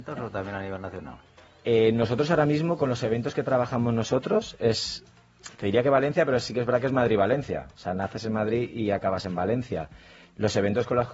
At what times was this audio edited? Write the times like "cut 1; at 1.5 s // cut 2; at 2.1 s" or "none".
none